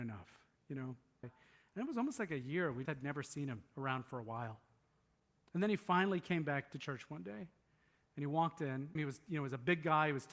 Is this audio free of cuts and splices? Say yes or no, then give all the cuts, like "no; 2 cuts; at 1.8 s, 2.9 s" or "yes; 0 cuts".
no; 3 cuts; at 1.2 s, 2.9 s, 9.0 s